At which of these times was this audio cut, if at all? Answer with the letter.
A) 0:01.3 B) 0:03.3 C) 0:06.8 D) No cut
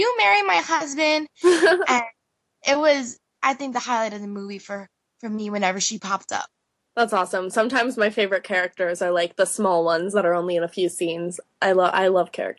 B